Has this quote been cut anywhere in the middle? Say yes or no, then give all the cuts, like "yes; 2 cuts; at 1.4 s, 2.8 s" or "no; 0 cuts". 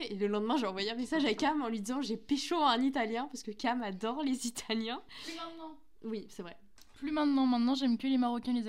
no; 0 cuts